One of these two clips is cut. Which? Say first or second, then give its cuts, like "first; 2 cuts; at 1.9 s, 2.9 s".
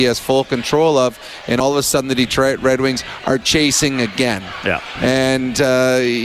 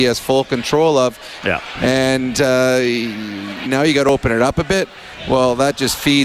second; 2 cuts; at 1.4 s, 3.7 s